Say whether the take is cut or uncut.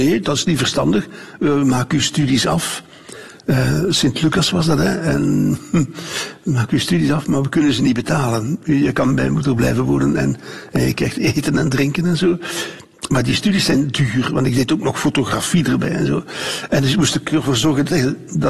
uncut